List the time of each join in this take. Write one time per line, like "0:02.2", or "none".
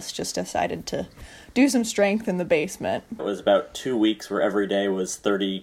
0:03.2